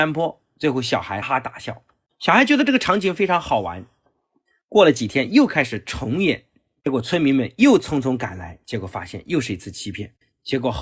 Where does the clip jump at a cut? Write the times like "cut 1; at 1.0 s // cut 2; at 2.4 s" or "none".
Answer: cut 1; at 1.2 s